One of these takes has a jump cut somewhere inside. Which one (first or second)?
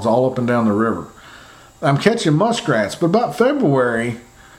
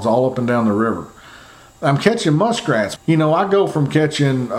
second